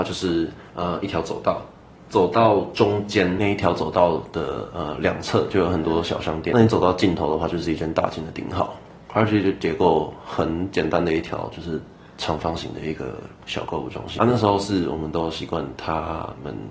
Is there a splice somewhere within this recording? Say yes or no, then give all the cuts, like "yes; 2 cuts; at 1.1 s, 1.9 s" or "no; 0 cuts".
no; 0 cuts